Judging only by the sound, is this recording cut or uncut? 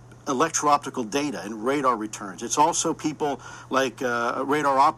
uncut